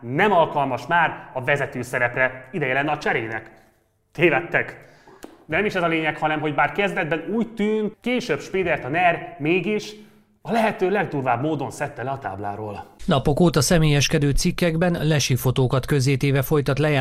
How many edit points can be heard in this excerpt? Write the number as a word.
one